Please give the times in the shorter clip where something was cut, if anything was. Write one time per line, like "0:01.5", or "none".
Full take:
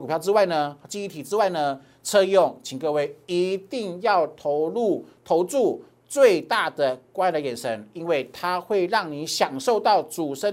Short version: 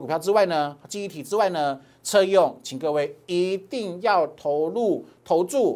none